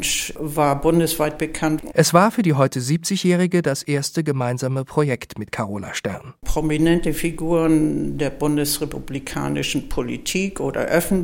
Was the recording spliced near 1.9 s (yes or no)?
yes